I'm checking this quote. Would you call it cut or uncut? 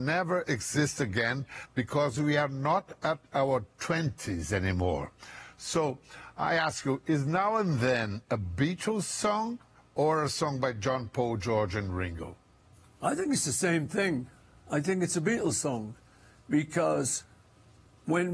uncut